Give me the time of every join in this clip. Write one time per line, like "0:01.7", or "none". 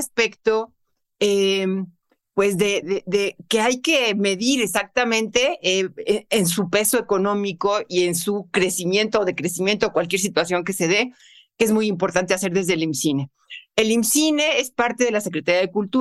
0:02.8